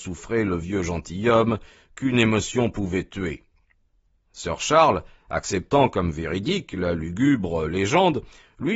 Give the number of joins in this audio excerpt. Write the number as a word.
zero